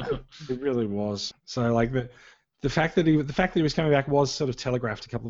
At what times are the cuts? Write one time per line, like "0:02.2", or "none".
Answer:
0:01.3